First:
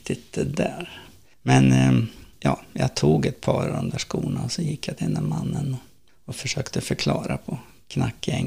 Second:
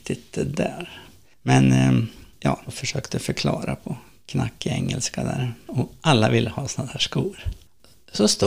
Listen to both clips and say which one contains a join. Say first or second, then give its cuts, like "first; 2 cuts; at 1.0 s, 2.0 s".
second; 2 cuts; at 2.7 s, 5.7 s